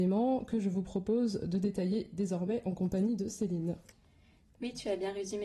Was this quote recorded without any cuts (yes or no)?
yes